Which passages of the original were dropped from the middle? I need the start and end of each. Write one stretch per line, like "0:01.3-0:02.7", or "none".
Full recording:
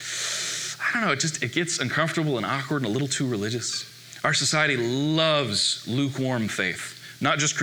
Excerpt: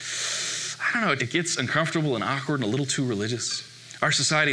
0:01.2-0:01.4